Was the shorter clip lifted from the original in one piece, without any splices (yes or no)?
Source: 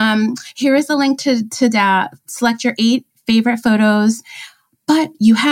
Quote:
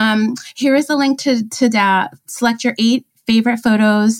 yes